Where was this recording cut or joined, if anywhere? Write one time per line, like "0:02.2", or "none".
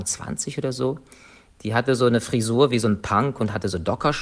none